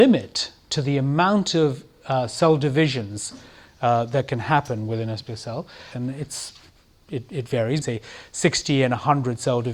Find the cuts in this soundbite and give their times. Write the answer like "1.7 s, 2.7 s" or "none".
5.9 s, 7.8 s